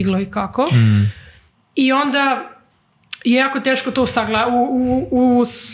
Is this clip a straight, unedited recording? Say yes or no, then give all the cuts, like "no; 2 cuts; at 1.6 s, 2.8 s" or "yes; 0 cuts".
yes; 0 cuts